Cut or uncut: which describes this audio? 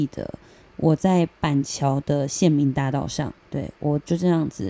cut